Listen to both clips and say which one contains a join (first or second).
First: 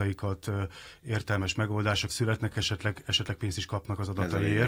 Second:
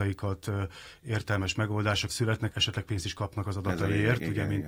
second